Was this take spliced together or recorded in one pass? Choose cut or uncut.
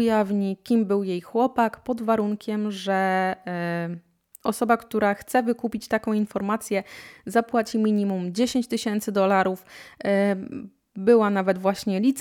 uncut